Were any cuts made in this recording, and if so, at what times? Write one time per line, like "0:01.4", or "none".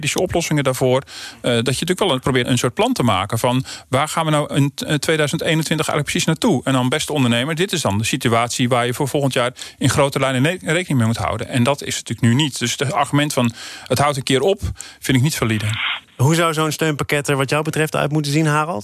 0:02.4